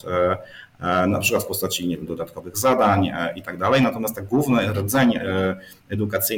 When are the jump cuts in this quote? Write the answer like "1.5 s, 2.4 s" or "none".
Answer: 2.1 s